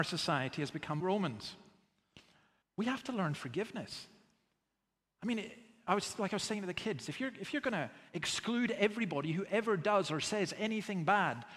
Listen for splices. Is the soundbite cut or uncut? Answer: cut